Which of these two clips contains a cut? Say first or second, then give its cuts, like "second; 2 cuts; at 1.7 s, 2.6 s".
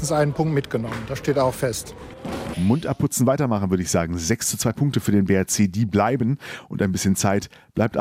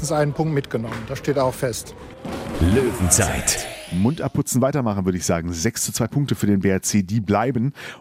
first; 1 cut; at 2.5 s